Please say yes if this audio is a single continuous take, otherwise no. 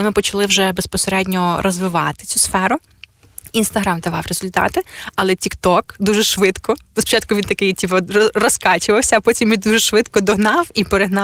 yes